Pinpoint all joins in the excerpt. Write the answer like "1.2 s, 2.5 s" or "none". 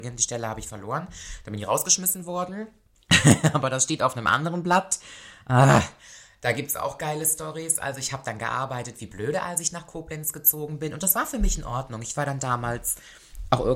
none